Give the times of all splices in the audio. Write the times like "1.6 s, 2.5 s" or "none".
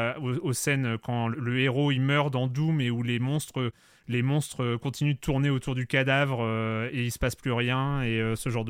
1.3 s